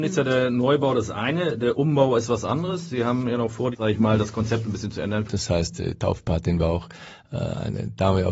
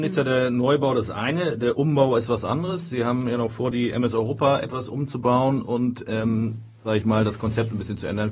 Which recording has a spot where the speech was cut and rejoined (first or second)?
first